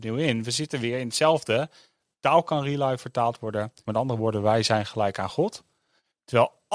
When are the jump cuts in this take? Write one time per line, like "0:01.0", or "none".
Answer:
0:03.9